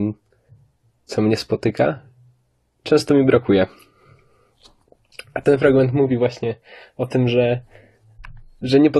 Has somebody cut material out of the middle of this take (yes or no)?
no